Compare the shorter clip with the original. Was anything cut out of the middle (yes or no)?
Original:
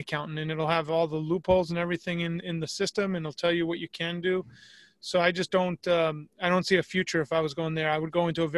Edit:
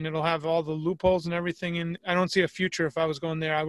yes